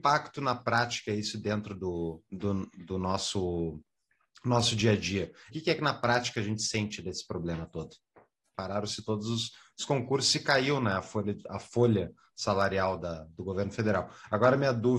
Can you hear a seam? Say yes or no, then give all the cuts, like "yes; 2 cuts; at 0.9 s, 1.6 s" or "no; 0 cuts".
yes; 2 cuts; at 5.5 s, 8.5 s